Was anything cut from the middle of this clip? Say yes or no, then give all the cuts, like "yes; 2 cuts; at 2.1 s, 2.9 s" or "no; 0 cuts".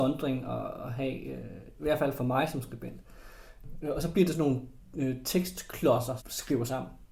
yes; 2 cuts; at 3.8 s, 6.2 s